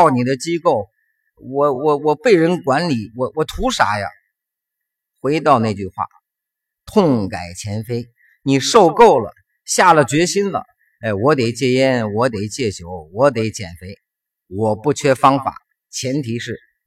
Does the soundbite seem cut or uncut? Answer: uncut